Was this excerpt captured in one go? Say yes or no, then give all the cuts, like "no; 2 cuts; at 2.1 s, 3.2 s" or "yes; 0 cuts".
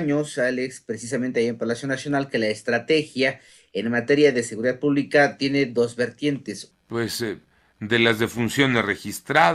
no; 1 cut; at 6.7 s